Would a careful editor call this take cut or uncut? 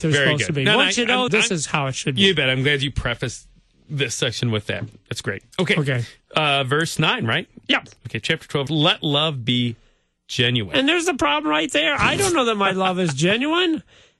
cut